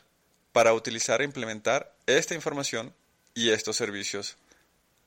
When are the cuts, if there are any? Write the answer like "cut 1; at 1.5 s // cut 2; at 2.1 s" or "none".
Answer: none